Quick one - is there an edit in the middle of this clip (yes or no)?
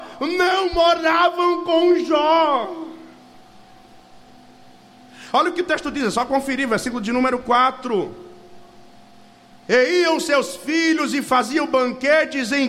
no